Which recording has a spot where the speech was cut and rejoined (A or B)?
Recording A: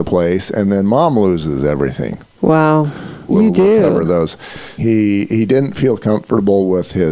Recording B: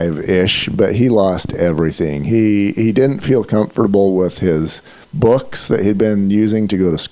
A